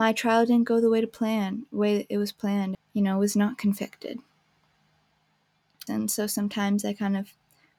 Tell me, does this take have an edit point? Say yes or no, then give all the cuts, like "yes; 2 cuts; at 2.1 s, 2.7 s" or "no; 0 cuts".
yes; 2 cuts; at 2.7 s, 5.9 s